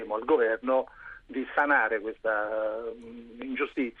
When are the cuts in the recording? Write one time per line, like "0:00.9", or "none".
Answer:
none